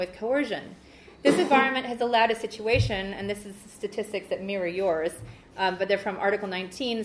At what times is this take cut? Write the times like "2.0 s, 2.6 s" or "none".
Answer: none